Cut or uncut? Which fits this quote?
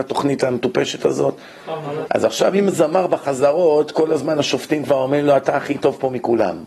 cut